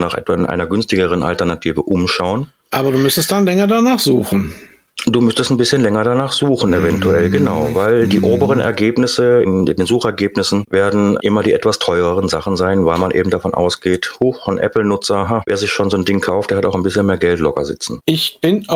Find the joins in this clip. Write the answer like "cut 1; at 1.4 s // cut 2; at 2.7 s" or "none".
none